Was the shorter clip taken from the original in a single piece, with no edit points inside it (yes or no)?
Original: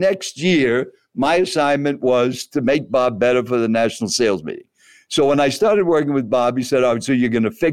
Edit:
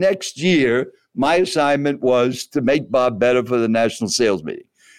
yes